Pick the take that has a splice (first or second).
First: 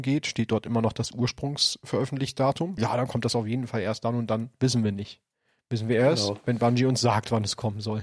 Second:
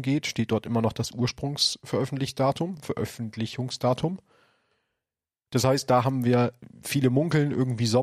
first